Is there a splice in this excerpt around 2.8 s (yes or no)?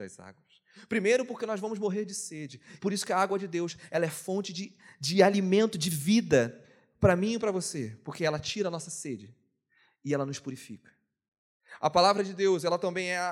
yes